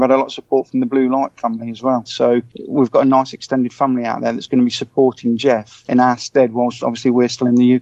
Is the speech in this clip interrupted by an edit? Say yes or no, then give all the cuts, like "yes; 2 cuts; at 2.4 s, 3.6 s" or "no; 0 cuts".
yes; 1 cut; at 2.0 s